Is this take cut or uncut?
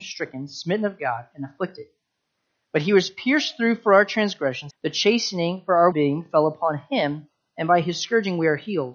cut